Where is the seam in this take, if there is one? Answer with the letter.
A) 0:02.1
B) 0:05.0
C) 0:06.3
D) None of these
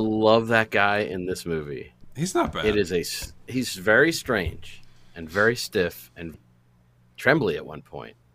C